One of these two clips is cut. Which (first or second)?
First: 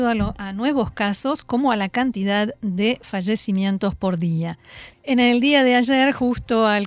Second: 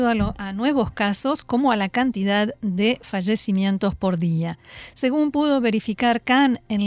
first